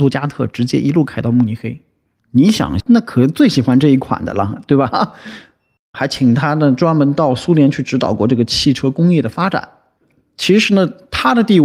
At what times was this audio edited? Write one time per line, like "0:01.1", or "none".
0:02.8
0:05.8